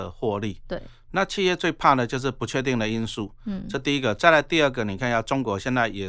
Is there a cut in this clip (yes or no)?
no